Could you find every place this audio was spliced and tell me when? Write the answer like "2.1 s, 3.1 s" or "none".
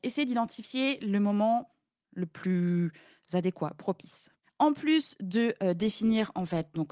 none